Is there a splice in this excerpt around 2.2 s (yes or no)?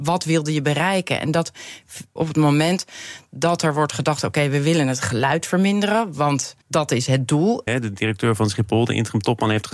yes